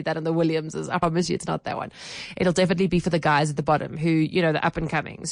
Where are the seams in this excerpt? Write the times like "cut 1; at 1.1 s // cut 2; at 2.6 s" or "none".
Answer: none